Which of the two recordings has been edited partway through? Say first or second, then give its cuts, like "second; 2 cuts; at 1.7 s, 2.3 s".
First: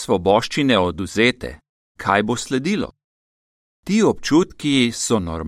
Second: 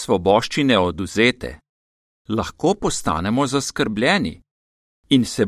first; 1 cut; at 2.0 s